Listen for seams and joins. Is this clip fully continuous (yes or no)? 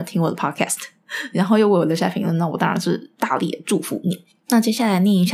yes